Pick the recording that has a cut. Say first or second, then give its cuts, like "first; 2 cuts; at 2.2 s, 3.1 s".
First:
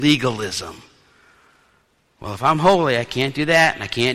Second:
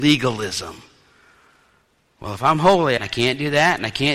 second; 1 cut; at 3.0 s